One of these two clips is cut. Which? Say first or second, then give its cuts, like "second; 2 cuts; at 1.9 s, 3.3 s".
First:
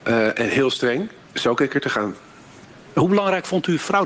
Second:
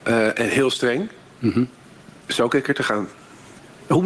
first; 1 cut; at 1.2 s